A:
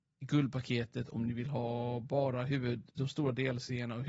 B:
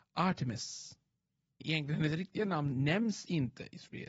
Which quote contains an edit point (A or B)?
B